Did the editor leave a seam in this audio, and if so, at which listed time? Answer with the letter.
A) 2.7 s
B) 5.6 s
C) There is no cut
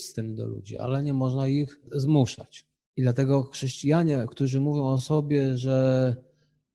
A